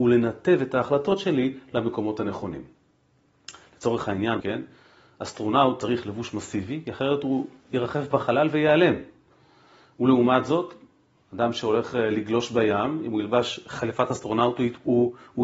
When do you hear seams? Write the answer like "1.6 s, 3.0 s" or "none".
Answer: 4.4 s